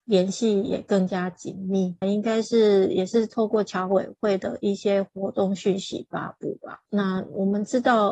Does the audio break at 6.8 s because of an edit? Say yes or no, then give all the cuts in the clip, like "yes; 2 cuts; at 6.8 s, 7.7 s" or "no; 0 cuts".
no; 1 cut; at 2.0 s